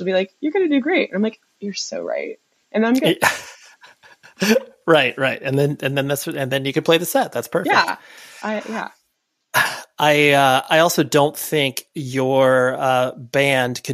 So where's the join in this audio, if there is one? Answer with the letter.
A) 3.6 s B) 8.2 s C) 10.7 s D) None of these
D